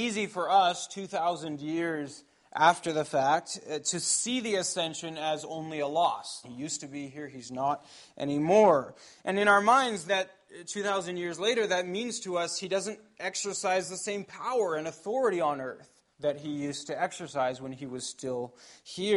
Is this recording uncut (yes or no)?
no